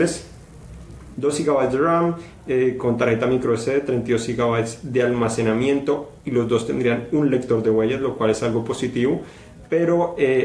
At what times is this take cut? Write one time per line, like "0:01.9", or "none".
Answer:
0:01.1